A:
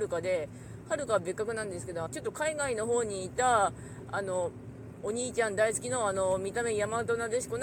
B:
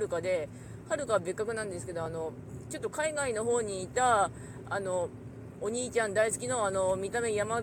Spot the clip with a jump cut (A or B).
A